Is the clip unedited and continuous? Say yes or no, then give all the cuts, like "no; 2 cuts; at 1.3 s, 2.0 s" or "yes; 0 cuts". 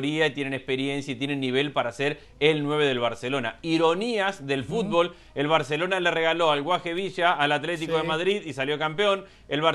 yes; 0 cuts